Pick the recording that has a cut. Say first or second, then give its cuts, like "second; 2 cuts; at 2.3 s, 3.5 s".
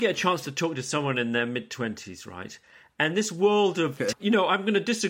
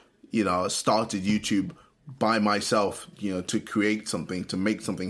first; 1 cut; at 4.1 s